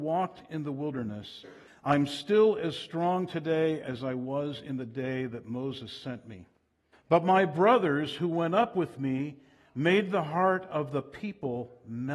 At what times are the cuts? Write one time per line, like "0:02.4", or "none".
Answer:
0:01.7
0:06.9